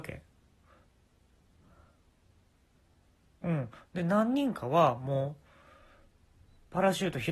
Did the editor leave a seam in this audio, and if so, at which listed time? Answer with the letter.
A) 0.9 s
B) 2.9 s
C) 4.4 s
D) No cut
D